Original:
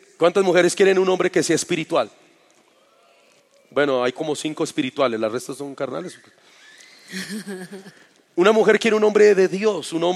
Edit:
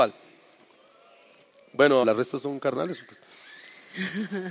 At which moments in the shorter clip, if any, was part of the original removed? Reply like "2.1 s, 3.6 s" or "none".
2.0 s